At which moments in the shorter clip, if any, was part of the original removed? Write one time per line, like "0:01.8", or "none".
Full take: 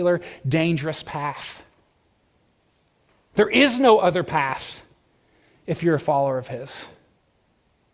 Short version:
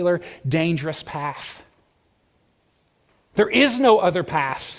none